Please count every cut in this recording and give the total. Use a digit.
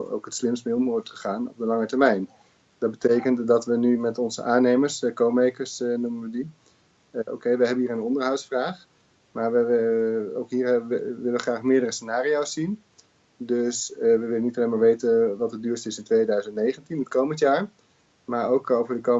1